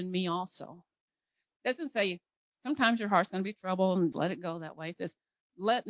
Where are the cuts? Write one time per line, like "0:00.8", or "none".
0:02.4
0:04.1